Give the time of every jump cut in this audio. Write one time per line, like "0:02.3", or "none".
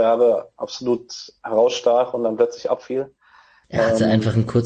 0:03.6